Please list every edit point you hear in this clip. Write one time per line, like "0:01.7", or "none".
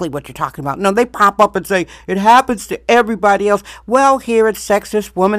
none